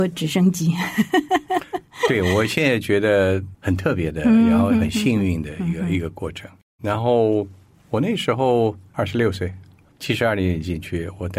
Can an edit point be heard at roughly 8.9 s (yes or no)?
yes